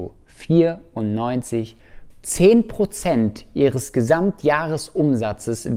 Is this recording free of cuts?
no; 1 cut; at 2.1 s

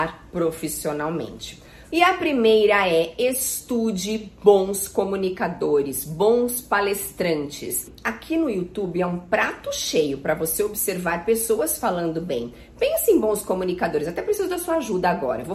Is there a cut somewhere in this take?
yes; 1 cut; at 1.8 s

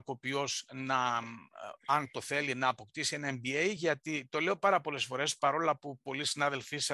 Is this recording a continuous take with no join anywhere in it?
yes; 0 cuts

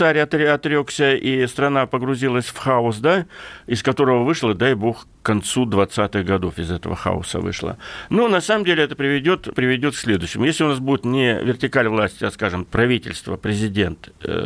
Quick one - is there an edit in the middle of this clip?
yes; 3 cuts; at 8.1 s, 9.5 s, 12.7 s

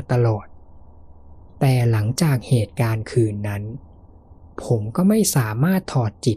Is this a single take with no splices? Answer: yes; 0 cuts

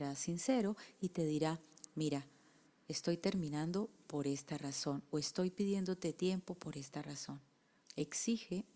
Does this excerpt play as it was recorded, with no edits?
no; 1 cut; at 7.8 s

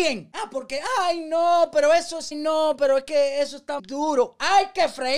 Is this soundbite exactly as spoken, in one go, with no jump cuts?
no; 2 cuts; at 2.3 s, 3.8 s

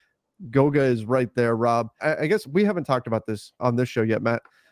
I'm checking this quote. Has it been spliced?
yes; 2 cuts; at 2.0 s, 3.6 s

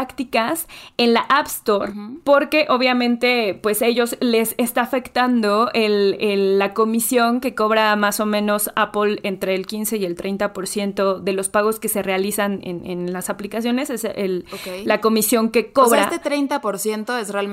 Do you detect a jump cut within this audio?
no; 0 cuts

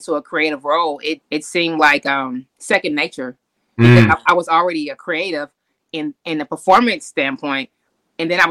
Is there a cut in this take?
yes; 1 cut; at 1.2 s

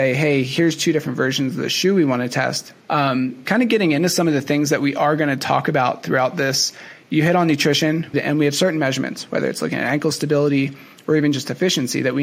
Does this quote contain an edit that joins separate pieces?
yes; 3 cuts; at 2.8 s, 8.1 s, 9.3 s

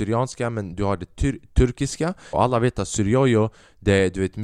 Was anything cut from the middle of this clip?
yes; 1 cut; at 2.3 s

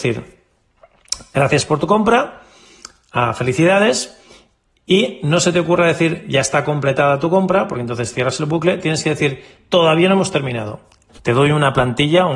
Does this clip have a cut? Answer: yes; 1 cut; at 11.1 s

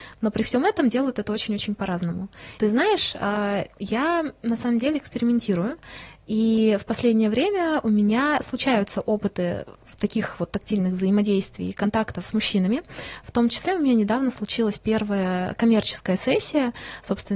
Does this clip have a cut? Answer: yes; 1 cut; at 2.6 s

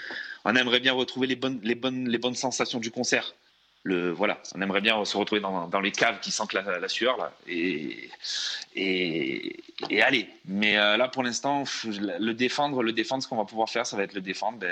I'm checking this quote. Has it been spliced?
no; 0 cuts

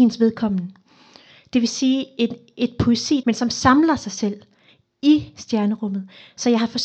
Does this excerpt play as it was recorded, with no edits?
no; 1 cut; at 3.2 s

